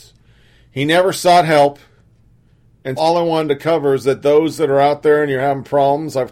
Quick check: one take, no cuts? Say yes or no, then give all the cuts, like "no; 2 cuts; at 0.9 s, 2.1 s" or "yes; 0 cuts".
no; 1 cut; at 3.0 s